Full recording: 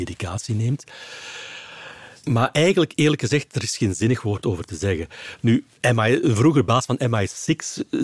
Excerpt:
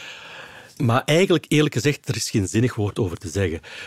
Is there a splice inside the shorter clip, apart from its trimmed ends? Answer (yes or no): no